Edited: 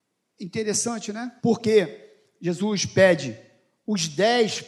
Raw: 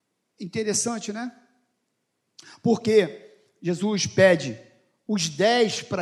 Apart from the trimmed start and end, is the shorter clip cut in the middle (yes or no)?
yes